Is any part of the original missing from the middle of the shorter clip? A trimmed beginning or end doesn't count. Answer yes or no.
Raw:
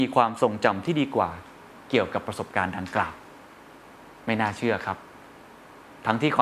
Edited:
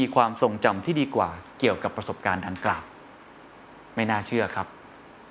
yes